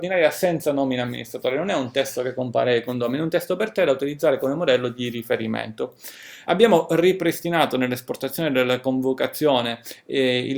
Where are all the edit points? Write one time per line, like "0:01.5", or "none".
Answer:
0:06.4